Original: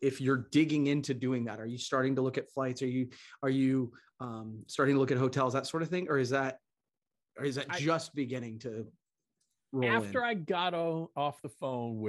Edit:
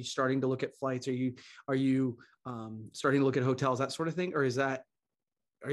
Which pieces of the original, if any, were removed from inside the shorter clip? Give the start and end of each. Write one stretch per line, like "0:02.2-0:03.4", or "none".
none